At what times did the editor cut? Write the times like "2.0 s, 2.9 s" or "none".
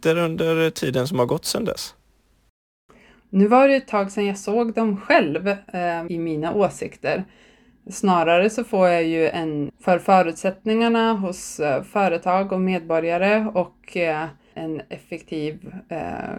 6.1 s, 9.7 s, 14.5 s